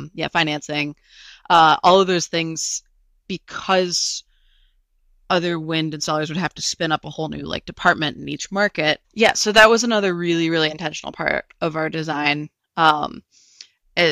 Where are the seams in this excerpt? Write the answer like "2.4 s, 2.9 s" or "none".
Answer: 9.0 s